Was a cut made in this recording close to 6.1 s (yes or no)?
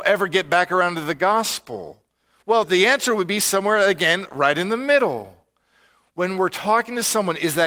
no